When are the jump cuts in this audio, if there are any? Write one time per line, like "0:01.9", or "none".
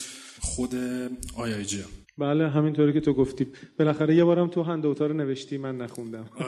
none